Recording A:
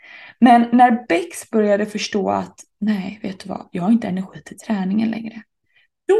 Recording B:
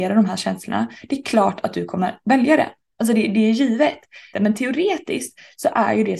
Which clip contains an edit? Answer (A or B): B